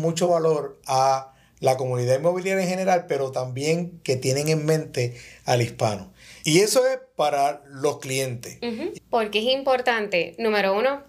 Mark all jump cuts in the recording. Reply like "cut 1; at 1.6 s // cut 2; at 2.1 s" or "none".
cut 1; at 6.4 s // cut 2; at 8.9 s